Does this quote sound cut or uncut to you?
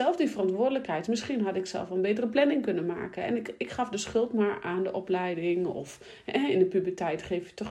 uncut